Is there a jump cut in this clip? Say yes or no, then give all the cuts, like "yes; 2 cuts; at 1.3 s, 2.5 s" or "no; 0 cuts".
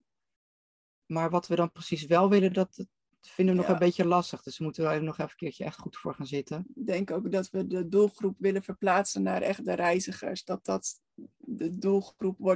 no; 0 cuts